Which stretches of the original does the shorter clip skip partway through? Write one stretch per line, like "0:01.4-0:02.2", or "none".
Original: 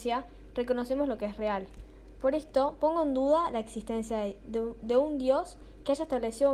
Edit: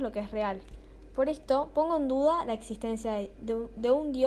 none